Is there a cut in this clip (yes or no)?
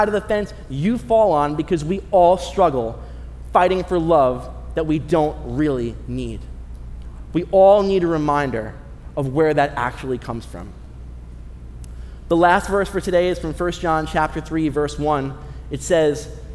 no